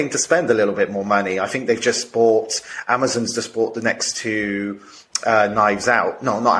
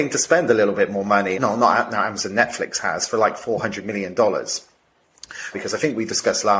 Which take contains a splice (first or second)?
second